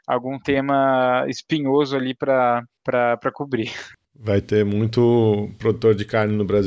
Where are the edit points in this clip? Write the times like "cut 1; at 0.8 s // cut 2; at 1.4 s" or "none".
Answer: cut 1; at 4.0 s